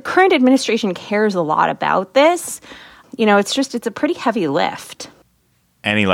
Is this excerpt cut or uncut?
uncut